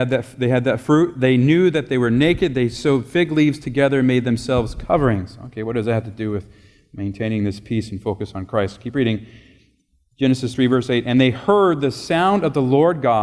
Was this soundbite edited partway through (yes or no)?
no